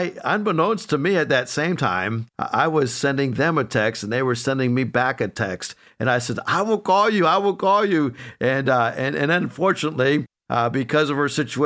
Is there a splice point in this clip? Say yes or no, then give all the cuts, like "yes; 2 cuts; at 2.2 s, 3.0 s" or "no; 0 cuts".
no; 0 cuts